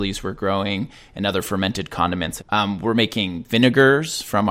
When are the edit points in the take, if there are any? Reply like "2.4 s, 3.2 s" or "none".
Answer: 2.4 s